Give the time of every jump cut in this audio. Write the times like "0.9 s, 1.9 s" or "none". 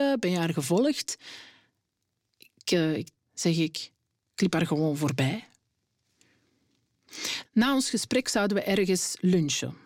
3.1 s, 7.4 s